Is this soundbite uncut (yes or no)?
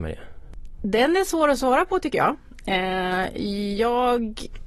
yes